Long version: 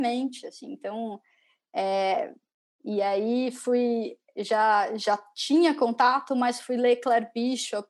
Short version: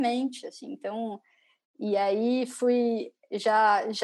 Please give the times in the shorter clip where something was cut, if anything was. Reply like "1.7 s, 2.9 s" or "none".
1.6 s